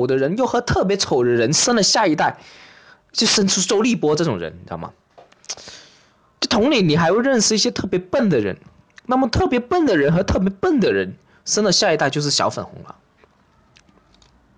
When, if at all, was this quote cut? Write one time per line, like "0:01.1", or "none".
none

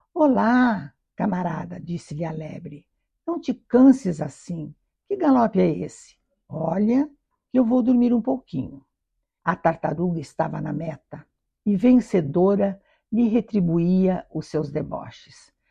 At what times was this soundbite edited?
0:09.4

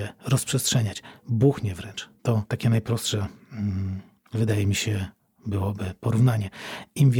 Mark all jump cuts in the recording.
0:02.2

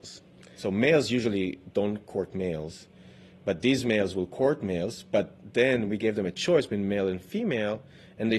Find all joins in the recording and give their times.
none

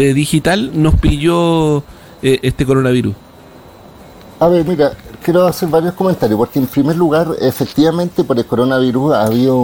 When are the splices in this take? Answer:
0:02.4

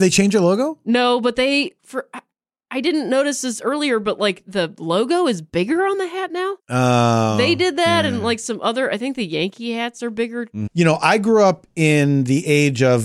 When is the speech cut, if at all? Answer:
0:06.6
0:10.7

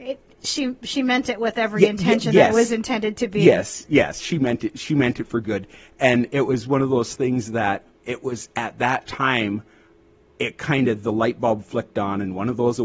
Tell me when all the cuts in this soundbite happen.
none

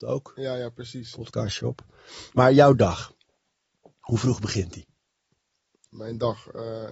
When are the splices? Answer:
none

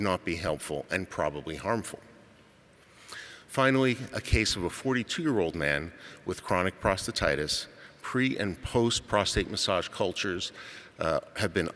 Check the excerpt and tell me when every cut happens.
none

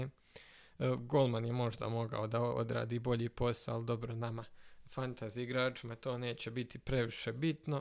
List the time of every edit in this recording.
none

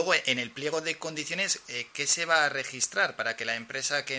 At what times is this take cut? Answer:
none

